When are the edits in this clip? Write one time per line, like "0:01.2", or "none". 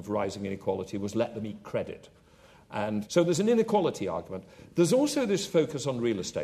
0:03.1